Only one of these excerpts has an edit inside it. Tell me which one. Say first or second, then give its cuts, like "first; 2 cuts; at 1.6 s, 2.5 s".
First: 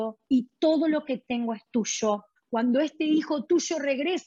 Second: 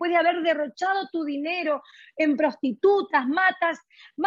first; 1 cut; at 2.4 s